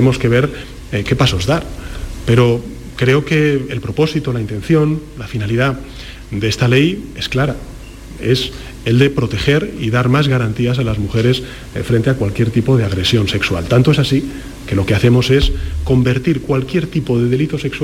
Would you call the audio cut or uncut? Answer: uncut